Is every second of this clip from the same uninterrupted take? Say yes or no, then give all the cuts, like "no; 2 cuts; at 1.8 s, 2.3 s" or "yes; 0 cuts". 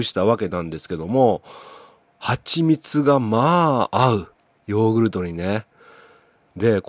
yes; 0 cuts